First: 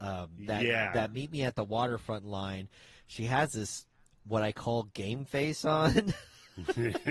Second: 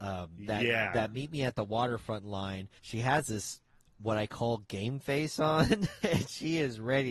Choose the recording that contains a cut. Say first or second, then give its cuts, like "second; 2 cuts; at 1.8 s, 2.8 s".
second; 2 cuts; at 2.8 s, 6.0 s